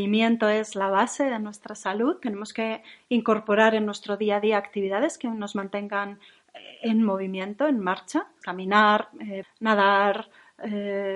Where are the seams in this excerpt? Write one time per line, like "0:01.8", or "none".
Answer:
0:08.4
0:09.4